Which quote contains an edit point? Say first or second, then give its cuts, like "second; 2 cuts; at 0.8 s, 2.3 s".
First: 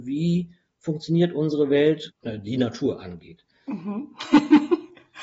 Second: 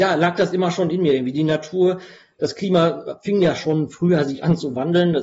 first; 1 cut; at 2.1 s